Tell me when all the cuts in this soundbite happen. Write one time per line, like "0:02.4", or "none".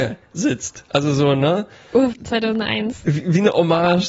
0:02.1